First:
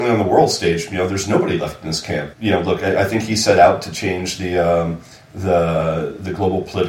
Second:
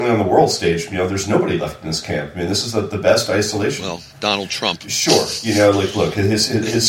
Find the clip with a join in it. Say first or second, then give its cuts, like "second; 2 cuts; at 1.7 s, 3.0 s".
first; 1 cut; at 2.3 s